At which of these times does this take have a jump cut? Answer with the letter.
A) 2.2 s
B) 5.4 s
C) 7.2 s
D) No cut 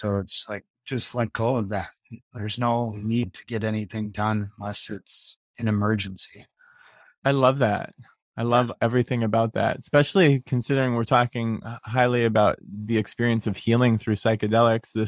B